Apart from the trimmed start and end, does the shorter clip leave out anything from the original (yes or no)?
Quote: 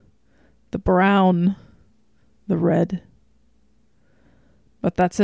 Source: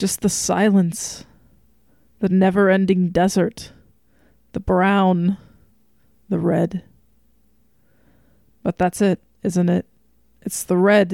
no